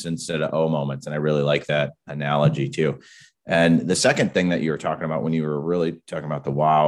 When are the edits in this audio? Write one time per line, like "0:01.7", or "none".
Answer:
none